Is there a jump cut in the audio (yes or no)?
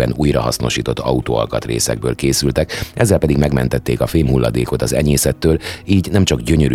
no